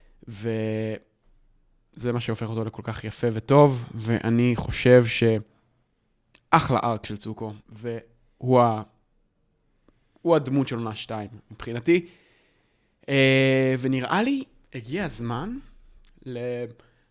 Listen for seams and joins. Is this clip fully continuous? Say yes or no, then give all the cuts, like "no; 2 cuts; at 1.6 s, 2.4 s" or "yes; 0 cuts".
no; 1 cut; at 7.6 s